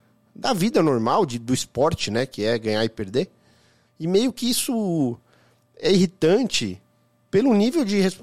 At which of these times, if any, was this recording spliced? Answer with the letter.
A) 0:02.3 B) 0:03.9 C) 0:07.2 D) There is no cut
B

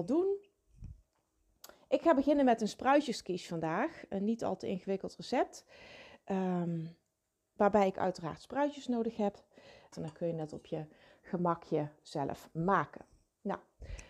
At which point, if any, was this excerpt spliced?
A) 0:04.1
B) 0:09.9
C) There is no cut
B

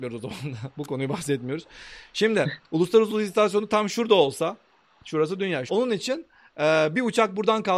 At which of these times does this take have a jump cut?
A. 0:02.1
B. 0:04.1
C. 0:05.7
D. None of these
C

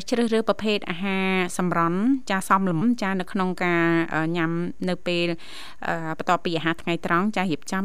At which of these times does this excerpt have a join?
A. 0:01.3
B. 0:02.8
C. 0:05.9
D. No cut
B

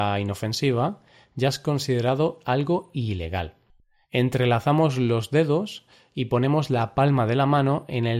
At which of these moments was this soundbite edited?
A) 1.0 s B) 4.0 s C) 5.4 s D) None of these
B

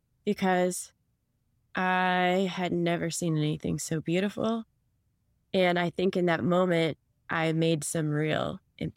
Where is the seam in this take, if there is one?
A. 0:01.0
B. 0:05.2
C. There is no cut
C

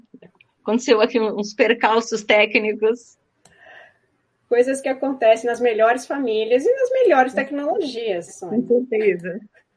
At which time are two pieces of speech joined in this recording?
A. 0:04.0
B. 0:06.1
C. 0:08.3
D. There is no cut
C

